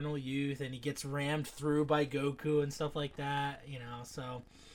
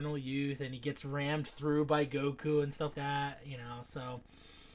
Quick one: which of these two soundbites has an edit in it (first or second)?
second